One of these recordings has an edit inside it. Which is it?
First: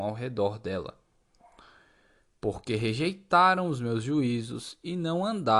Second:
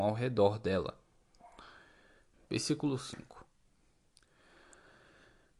second; 1 cut; at 2.3 s

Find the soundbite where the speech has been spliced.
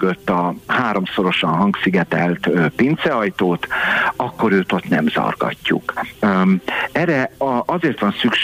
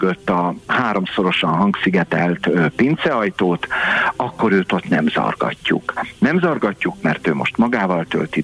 first; 1 cut; at 6.1 s

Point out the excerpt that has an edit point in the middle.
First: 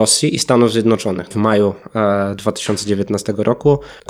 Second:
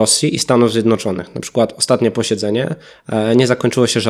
first; 1 cut; at 1.3 s

